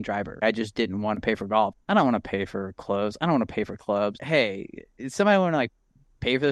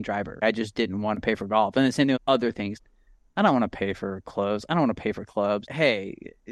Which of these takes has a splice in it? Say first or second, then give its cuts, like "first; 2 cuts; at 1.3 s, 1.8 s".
first; 1 cut; at 1.7 s